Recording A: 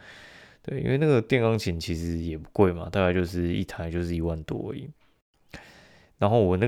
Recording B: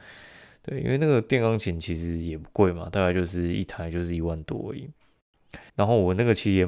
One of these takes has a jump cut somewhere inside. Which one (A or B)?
B